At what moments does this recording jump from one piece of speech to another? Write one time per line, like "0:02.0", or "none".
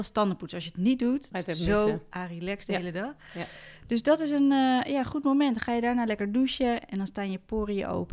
0:01.3